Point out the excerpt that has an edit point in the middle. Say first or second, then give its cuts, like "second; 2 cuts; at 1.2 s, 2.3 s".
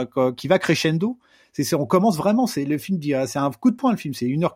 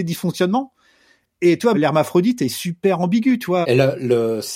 second; 2 cuts; at 1.7 s, 3.6 s